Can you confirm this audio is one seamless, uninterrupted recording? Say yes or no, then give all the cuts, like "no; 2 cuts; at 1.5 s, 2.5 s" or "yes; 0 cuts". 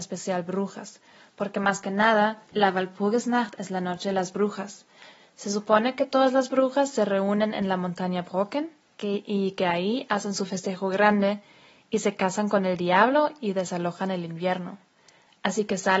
yes; 0 cuts